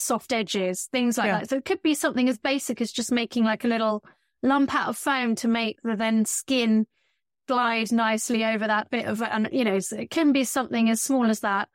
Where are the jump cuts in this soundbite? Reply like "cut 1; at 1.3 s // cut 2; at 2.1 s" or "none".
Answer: none